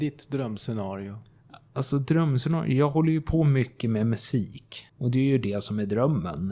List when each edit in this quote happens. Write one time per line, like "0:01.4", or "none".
0:04.9